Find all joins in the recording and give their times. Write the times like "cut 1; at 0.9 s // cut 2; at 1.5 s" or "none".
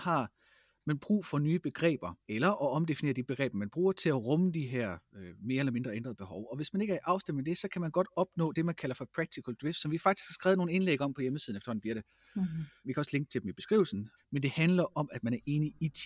cut 1; at 2.2 s // cut 2; at 12.8 s // cut 3; at 14.2 s